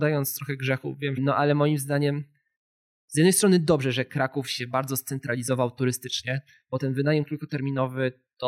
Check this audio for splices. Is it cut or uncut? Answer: cut